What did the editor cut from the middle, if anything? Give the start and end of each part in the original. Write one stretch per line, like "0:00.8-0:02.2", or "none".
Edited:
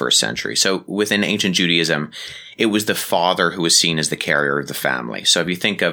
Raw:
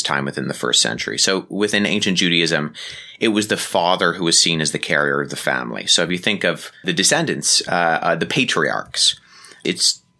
none